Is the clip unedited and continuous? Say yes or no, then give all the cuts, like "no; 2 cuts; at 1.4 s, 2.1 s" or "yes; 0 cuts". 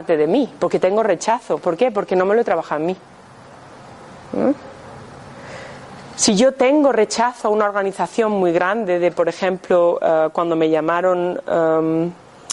yes; 0 cuts